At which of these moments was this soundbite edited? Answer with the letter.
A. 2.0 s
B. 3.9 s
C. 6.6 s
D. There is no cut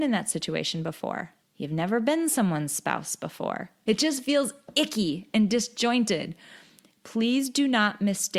B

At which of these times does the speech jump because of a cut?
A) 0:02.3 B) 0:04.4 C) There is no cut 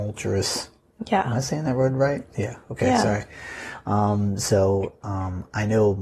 A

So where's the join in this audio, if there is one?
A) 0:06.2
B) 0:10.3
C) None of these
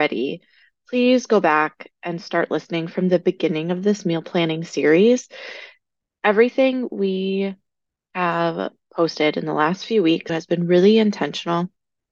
B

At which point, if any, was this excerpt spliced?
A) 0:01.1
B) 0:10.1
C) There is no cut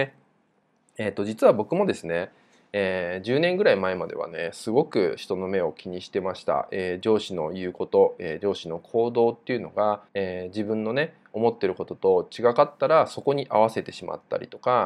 B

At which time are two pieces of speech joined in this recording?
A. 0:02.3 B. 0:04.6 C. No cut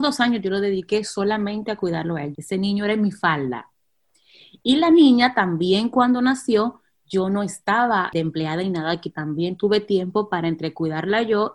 A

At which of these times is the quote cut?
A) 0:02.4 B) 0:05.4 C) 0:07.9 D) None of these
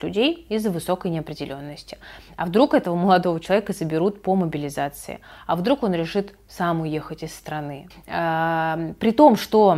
C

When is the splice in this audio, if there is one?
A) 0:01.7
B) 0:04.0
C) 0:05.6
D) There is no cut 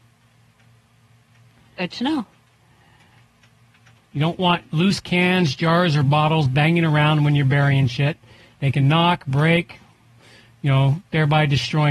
B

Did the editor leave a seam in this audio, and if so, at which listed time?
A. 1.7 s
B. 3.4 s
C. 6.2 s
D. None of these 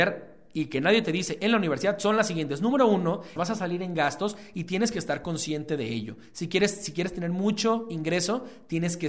B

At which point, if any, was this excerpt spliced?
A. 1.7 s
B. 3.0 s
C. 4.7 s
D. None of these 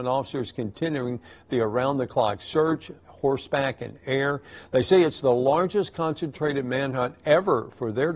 B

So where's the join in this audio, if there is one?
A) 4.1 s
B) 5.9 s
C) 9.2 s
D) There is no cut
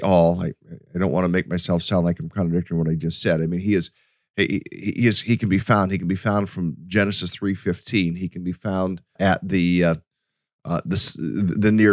C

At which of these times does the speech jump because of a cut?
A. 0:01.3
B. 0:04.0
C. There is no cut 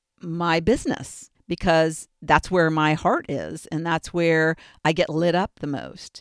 A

